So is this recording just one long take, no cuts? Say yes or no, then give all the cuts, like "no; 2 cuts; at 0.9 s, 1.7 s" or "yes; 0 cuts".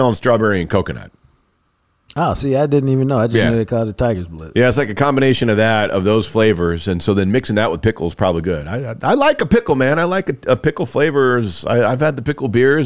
yes; 0 cuts